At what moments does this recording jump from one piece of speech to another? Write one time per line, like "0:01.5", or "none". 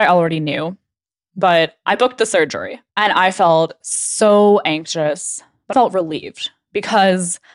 0:02.9
0:05.7